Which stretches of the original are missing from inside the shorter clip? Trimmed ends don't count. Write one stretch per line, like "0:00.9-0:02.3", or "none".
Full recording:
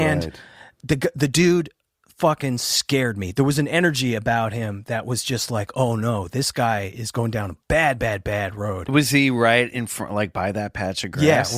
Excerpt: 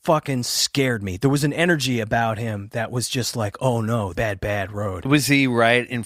0:06.3-0:08.0